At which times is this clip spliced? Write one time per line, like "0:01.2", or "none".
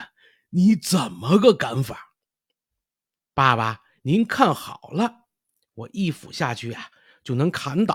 none